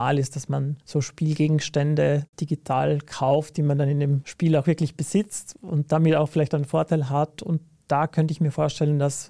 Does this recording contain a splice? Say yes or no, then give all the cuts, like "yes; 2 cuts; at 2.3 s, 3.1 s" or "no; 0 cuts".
no; 0 cuts